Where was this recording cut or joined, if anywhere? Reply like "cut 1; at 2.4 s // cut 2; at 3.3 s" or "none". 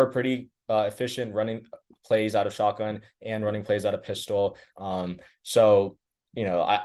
cut 1; at 4.7 s